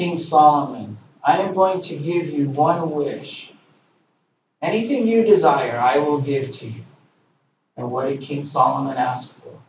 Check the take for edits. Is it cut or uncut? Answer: uncut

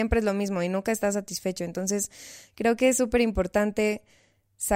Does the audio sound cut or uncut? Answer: uncut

